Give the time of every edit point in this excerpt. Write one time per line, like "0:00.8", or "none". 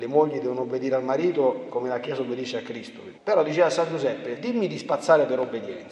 0:03.2
0:04.4